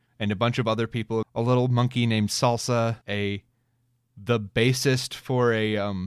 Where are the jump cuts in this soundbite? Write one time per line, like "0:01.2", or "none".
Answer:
0:01.2
0:03.0